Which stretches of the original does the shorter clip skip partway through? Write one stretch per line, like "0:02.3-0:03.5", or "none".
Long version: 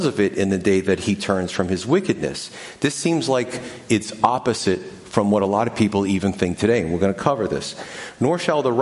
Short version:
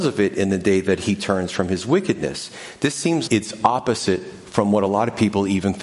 0:03.3-0:03.9